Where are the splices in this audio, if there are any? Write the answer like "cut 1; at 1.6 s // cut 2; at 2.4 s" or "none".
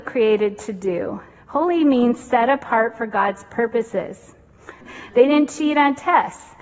cut 1; at 1.3 s // cut 2; at 4.8 s